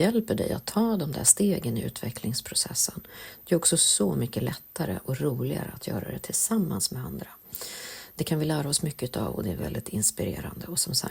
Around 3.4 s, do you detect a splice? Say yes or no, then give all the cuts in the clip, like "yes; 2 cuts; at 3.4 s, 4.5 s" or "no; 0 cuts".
no; 0 cuts